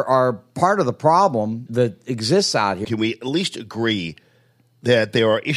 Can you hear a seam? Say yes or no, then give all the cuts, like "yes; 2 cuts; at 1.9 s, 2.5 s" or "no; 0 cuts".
yes; 2 cuts; at 1.7 s, 2.8 s